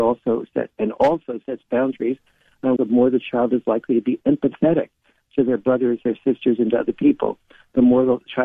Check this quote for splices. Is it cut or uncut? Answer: cut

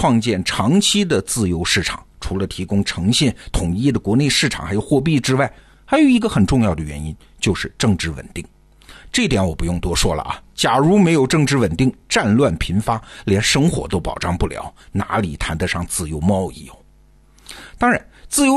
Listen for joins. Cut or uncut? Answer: uncut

